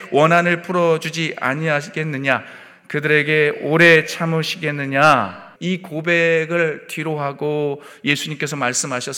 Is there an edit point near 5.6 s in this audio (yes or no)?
yes